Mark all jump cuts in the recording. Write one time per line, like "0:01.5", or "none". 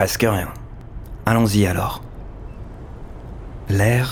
none